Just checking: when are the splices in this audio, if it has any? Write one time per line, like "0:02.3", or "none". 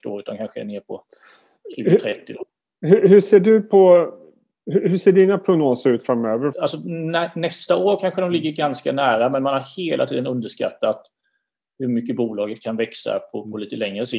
0:06.5